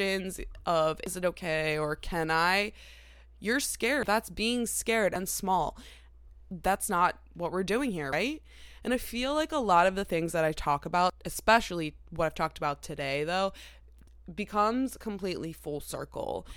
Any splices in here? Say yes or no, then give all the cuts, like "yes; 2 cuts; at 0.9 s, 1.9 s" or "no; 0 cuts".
yes; 1 cut; at 4.0 s